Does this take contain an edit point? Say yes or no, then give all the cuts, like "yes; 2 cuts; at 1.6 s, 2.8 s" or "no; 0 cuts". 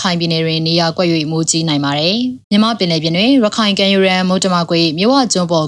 yes; 1 cut; at 2.4 s